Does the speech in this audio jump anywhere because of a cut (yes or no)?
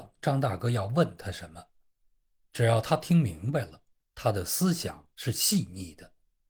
yes